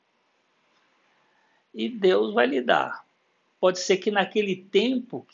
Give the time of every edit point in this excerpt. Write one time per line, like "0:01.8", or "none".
none